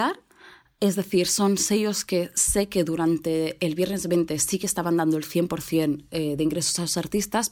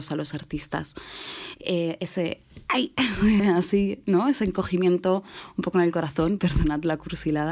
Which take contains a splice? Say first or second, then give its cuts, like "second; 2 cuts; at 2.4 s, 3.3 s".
second; 3 cuts; at 1.6 s, 3.4 s, 6.4 s